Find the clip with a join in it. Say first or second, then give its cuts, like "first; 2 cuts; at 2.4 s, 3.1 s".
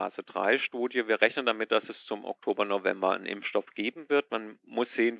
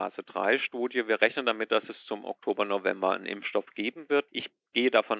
second; 1 cut; at 4.3 s